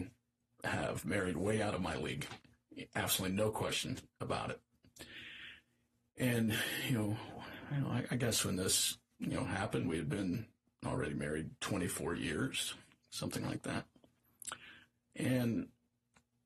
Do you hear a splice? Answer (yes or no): no